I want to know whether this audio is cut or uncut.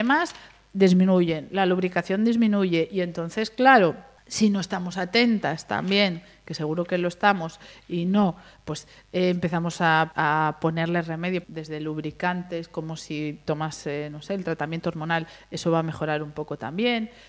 cut